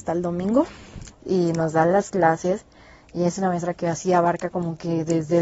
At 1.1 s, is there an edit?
yes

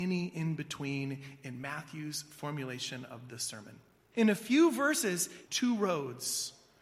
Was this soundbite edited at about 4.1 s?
yes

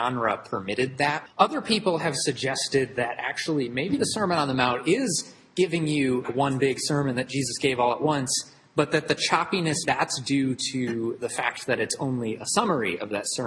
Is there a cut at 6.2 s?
yes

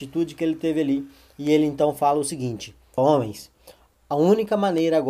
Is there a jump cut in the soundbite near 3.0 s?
yes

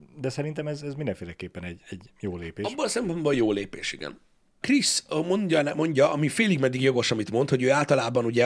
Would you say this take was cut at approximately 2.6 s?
no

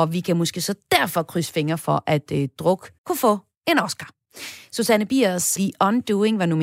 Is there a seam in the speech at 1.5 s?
no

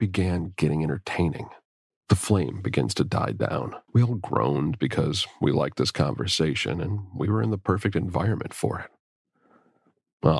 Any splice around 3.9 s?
yes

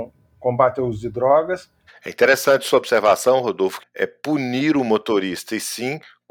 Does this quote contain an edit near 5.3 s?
no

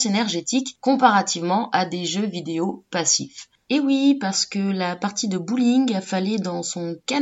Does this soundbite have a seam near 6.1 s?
no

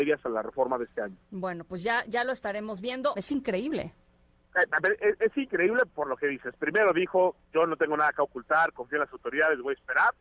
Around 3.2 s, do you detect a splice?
yes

